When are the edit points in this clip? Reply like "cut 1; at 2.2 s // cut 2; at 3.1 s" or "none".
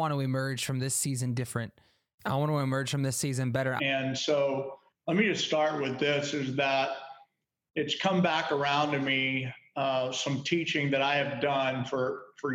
cut 1; at 3.8 s